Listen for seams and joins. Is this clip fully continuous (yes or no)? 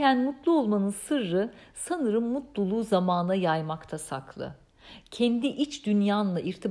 yes